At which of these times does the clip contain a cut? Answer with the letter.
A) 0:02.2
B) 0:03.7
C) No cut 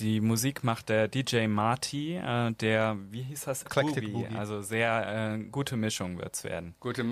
B